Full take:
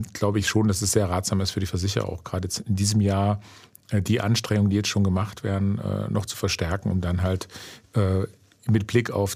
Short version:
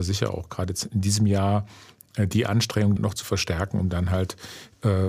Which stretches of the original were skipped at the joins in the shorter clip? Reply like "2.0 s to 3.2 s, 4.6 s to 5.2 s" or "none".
4.7 s to 6.1 s